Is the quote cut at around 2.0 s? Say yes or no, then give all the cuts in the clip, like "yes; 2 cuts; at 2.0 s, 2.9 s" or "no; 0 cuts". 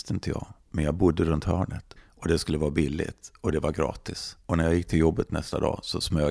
yes; 2 cuts; at 2.0 s, 4.4 s